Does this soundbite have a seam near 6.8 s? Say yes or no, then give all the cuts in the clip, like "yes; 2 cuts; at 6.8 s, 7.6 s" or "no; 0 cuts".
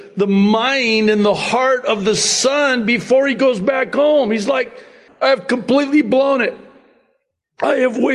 no; 1 cut; at 5.1 s